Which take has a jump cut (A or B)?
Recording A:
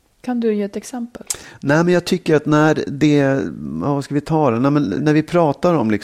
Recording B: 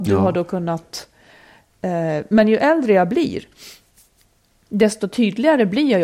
A